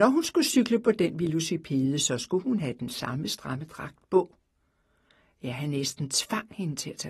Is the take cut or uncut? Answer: uncut